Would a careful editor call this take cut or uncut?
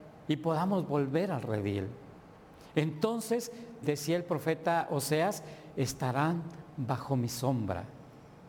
cut